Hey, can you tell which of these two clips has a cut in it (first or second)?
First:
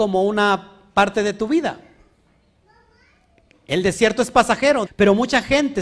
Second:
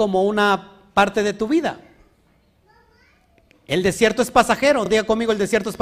first